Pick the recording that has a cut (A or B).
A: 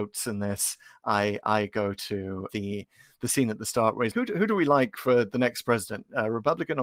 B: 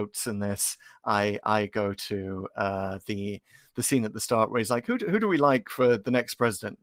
A